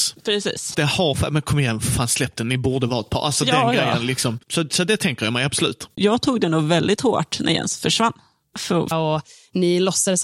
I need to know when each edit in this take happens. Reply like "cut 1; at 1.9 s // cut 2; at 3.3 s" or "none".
cut 1; at 5.9 s // cut 2; at 8.9 s